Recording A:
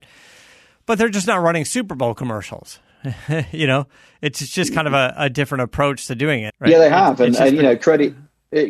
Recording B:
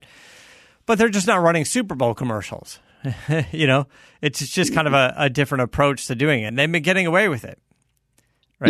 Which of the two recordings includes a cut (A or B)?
A